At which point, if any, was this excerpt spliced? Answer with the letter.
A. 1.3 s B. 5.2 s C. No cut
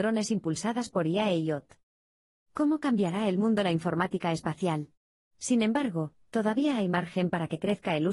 B